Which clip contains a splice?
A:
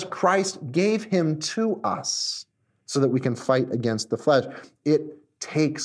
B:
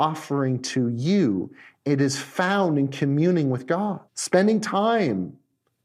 B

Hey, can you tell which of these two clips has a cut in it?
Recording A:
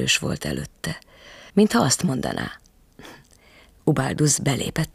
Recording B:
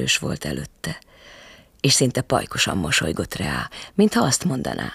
A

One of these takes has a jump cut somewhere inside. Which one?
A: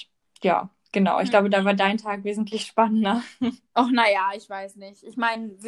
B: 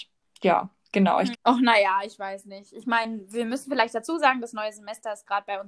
B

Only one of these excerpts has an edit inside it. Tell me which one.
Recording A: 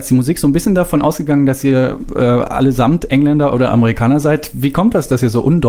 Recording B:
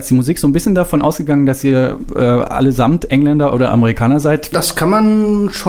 B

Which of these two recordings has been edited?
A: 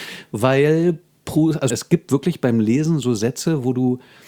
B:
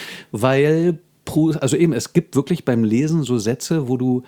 A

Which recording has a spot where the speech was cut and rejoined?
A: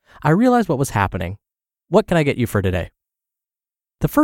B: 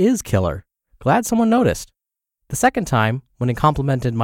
A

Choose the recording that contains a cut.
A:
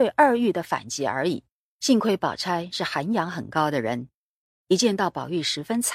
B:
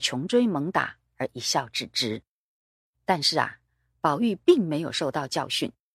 A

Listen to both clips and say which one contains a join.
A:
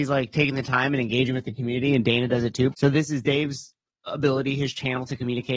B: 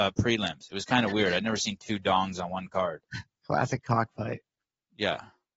A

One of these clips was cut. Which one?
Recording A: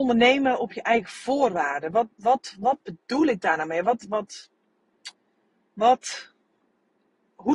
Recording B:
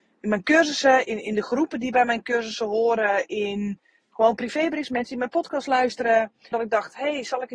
B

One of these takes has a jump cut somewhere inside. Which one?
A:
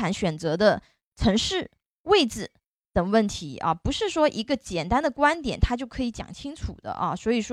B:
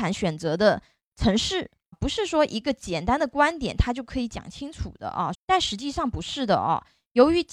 B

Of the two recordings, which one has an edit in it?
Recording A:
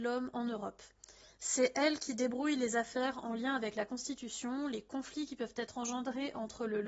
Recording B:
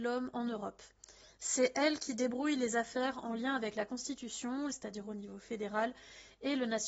B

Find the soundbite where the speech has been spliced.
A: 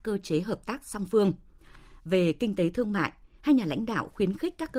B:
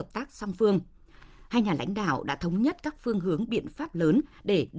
B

